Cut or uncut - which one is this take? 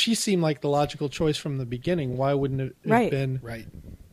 uncut